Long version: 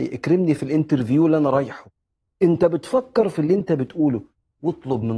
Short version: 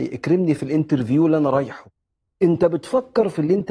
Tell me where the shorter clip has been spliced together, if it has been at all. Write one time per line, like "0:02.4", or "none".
none